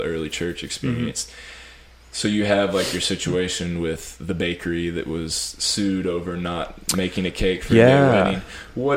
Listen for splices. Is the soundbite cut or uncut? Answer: uncut